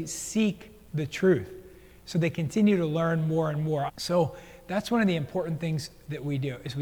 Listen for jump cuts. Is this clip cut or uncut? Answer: cut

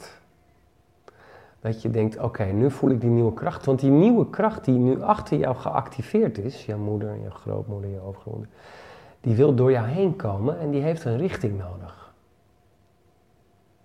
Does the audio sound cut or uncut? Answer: uncut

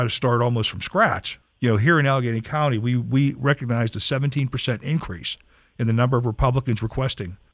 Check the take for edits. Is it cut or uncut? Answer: uncut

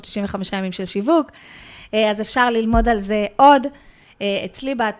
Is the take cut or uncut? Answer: uncut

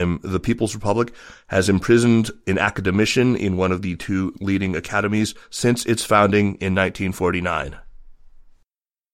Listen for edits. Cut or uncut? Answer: uncut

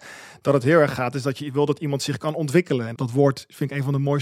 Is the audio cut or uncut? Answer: cut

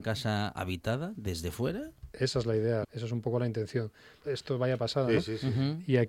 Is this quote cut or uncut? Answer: cut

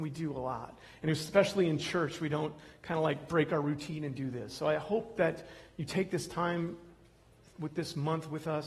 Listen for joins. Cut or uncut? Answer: uncut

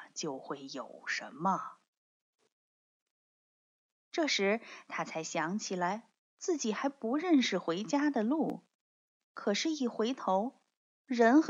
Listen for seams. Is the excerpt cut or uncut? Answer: cut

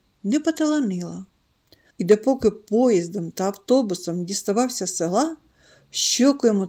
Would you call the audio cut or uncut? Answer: cut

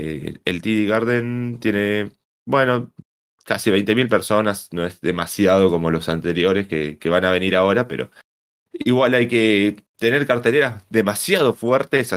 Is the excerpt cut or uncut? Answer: uncut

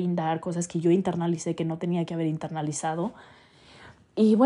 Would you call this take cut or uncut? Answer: uncut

